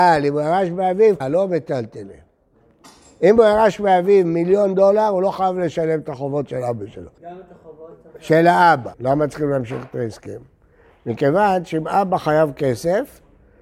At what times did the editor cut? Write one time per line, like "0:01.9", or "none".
0:01.2
0:07.2
0:08.9